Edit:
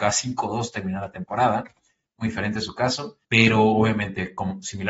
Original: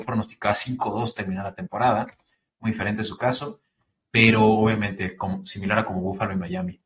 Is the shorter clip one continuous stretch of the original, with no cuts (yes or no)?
no